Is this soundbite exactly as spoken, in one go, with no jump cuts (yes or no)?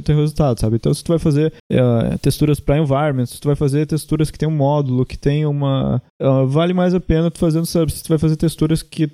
yes